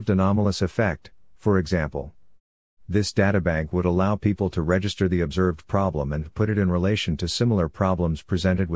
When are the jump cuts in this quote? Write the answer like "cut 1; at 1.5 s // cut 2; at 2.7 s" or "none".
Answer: none